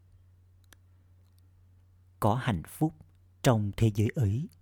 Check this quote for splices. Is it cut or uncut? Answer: uncut